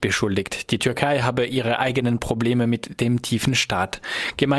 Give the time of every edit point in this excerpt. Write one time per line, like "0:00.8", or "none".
none